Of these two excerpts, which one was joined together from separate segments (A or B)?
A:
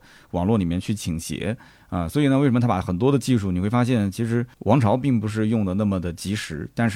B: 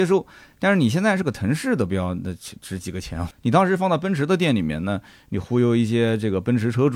B